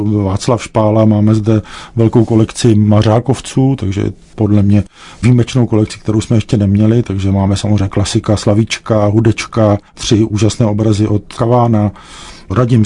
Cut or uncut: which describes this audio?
cut